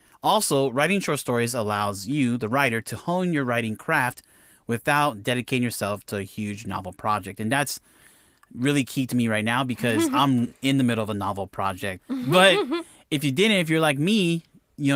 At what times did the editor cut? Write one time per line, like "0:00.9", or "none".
0:12.0

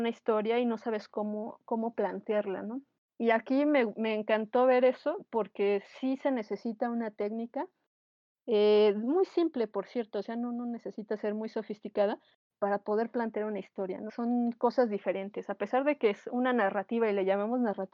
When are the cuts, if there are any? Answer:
0:03.1
0:14.1

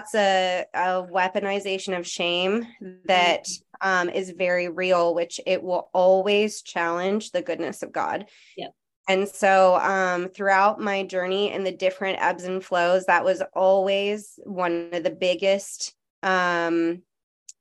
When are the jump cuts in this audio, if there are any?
none

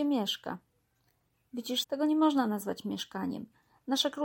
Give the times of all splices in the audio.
0:01.8

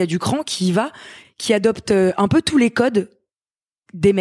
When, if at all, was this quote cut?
0:01.2

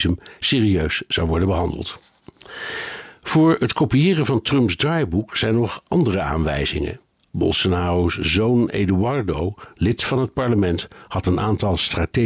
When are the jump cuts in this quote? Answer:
none

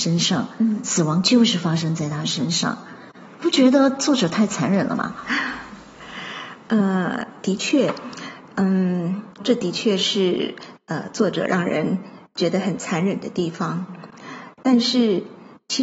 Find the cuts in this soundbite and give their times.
0:09.4

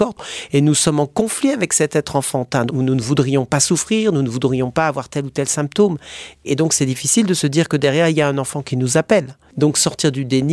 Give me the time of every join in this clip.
0:02.7

